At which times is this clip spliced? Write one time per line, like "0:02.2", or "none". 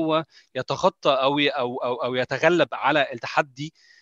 none